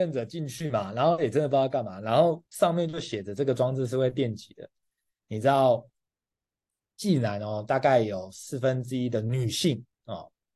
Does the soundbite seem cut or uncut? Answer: uncut